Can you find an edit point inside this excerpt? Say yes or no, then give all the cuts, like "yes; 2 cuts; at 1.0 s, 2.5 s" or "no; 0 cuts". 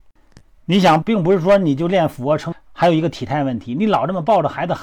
yes; 2 cuts; at 1.0 s, 2.5 s